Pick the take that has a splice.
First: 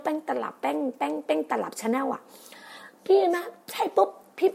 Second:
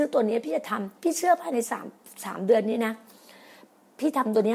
second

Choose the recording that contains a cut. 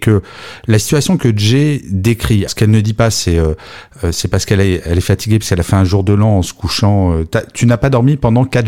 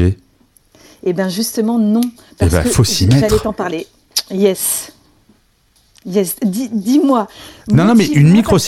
first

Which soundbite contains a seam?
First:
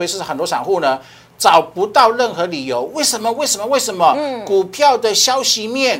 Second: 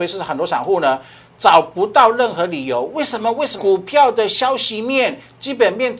second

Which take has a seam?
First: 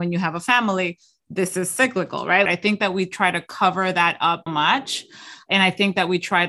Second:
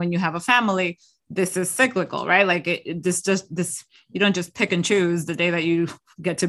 first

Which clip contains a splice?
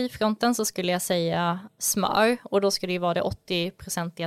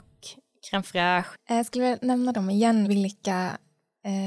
second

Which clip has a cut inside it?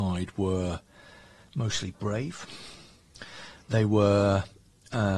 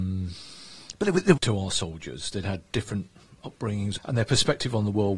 second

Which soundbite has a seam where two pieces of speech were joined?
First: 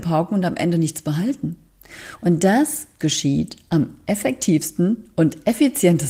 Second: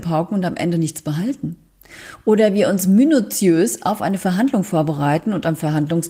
first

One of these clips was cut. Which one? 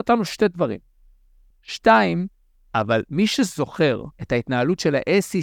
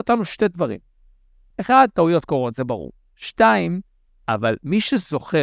first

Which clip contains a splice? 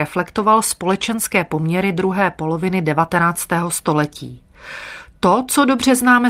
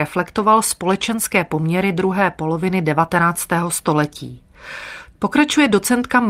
second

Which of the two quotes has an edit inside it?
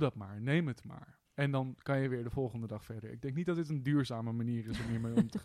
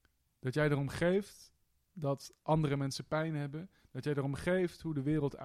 first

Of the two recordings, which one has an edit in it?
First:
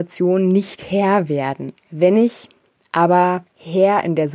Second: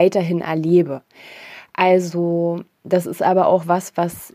first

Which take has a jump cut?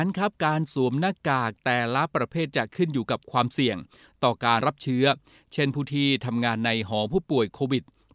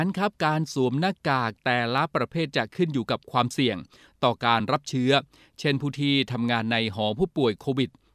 first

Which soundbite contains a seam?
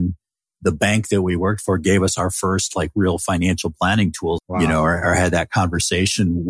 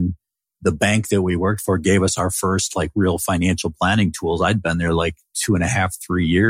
first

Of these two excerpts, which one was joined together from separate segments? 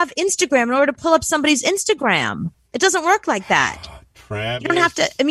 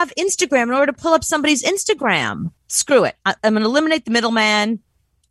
second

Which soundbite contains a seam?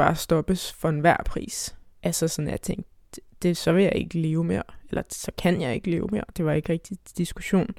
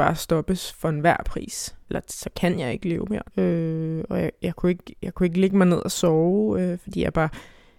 second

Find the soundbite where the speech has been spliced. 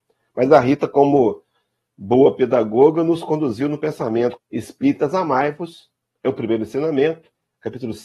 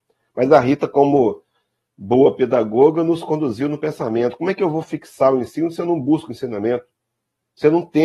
first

